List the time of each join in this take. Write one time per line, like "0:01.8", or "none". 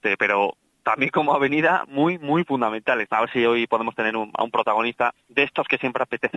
0:01.8
0:03.1